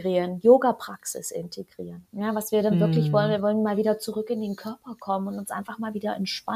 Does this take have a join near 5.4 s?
no; 1 cut; at 2.0 s

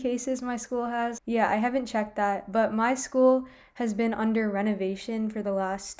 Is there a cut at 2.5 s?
no; 1 cut; at 1.2 s

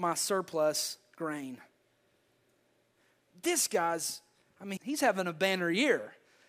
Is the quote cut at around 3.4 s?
no; 1 cut; at 4.8 s

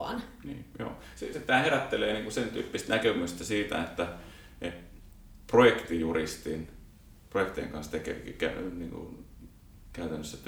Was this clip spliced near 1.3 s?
yes; 1 cut; at 1.3 s

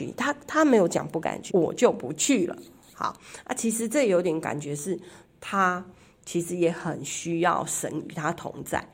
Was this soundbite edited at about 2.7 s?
no; 1 cut; at 1.5 s

